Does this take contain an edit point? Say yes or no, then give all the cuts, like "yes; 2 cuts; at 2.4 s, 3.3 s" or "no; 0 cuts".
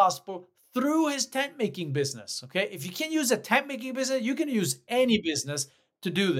no; 0 cuts